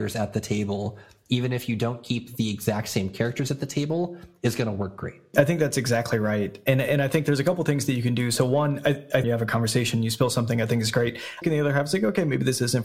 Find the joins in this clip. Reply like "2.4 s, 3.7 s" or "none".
9.2 s, 11.4 s